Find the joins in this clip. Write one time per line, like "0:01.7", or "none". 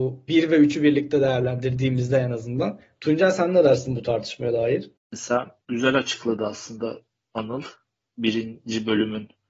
0:05.0